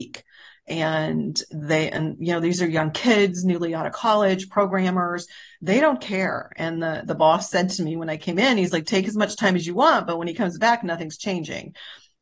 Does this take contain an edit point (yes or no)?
no